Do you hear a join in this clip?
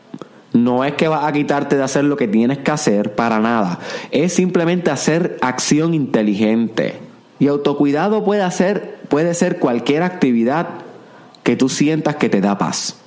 yes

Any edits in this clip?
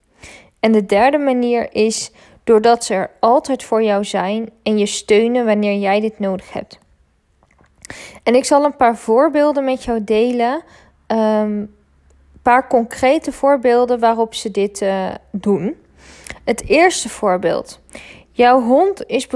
no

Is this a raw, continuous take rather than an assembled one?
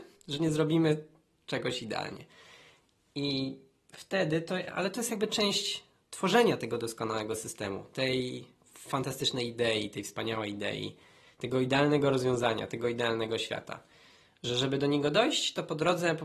yes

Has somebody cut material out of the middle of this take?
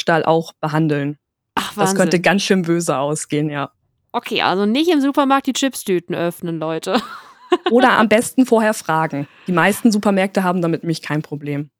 no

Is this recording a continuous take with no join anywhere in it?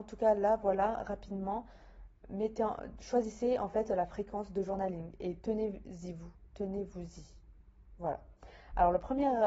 yes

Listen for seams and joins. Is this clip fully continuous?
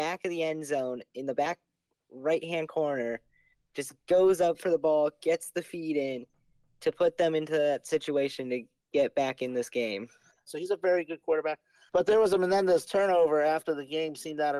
no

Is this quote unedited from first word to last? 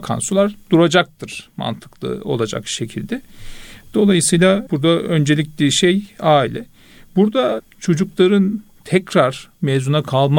yes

